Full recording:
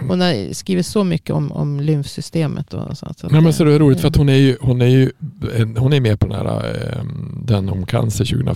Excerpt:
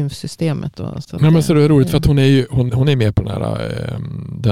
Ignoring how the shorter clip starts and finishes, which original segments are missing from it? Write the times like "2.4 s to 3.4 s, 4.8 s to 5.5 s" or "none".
3.0 s to 3.1 s, 4.8 s to 5.7 s